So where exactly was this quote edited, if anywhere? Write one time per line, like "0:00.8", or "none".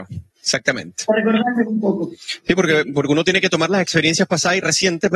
none